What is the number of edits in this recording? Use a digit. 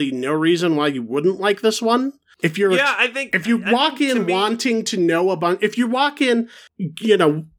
0